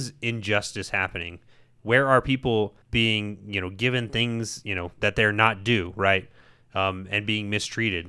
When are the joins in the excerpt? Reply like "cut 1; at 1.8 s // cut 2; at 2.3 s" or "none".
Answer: cut 1; at 2.8 s